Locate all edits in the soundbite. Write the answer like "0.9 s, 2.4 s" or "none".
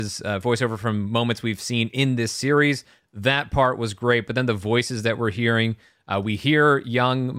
3.0 s